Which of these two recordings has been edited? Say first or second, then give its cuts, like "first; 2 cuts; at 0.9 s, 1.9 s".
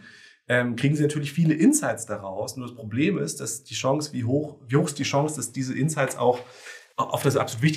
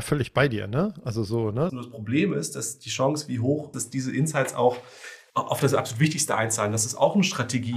second; 2 cuts; at 1.7 s, 3.7 s